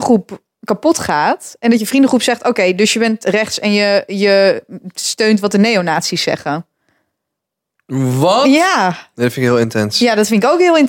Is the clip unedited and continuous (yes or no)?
yes